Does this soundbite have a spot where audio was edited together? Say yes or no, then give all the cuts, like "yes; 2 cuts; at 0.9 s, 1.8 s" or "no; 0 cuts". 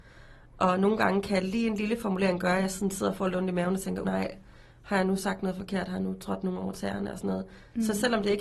yes; 1 cut; at 4.0 s